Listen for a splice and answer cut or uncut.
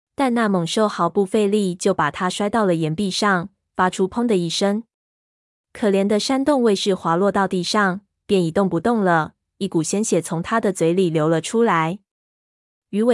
uncut